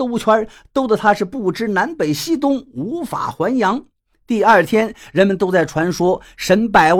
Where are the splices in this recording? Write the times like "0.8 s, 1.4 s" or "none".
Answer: none